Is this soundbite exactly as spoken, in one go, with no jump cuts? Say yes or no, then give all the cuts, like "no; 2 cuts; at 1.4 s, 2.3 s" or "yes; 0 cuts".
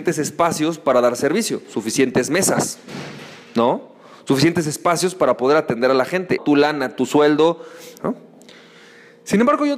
no; 2 cuts; at 6.4 s, 8.0 s